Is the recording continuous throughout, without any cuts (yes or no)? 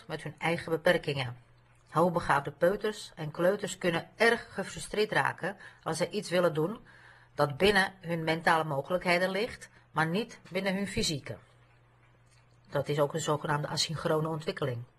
yes